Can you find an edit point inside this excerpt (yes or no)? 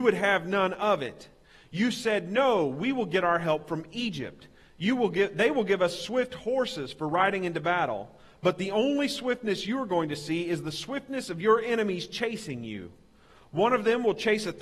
no